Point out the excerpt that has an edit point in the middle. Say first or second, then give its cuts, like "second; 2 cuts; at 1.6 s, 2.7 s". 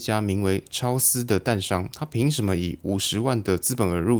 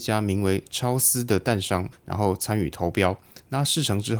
second; 1 cut; at 1.9 s